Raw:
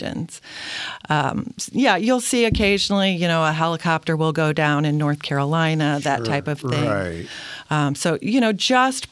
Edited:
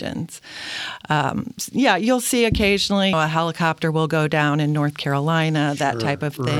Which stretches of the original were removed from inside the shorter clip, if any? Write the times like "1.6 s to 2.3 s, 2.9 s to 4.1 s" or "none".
3.1 s to 3.4 s